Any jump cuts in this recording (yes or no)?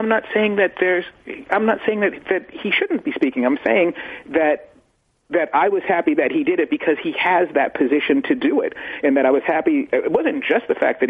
no